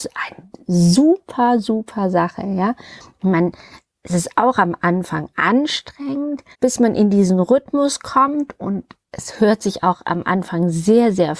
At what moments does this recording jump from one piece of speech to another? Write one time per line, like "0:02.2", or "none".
0:06.5

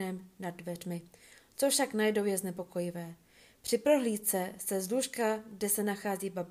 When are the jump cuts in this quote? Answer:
none

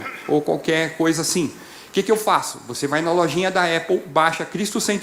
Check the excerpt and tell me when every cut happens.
none

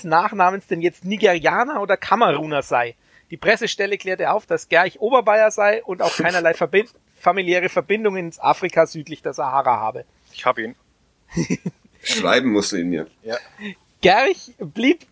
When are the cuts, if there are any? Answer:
none

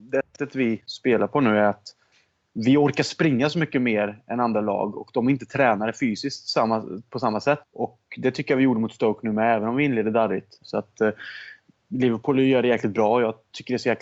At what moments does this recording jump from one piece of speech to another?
0:07.6
0:10.6

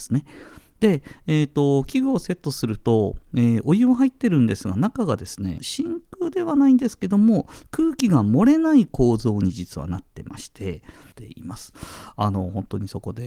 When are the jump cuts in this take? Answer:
0:05.6
0:11.1

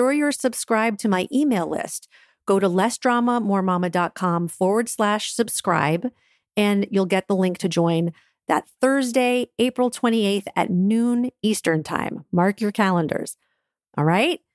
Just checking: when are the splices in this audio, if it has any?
none

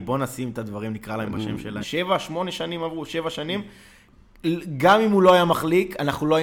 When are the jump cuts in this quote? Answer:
0:01.8

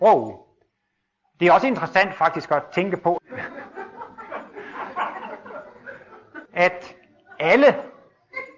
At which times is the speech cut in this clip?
0:03.2
0:06.4

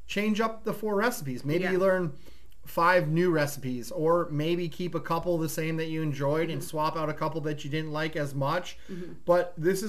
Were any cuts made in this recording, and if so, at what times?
none

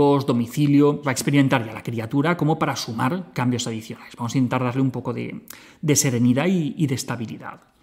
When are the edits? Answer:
0:01.0

